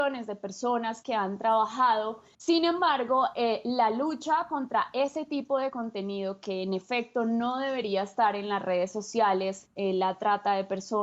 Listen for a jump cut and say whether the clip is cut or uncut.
cut